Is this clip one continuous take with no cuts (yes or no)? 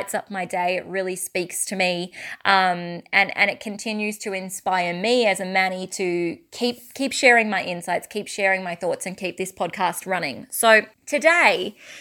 no